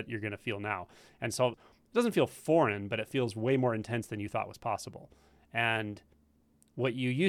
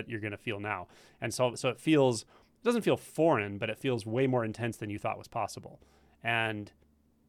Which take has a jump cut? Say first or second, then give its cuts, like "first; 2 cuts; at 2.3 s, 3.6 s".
first; 1 cut; at 1.5 s